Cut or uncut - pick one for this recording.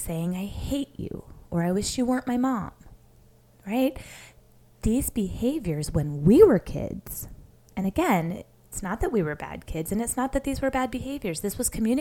uncut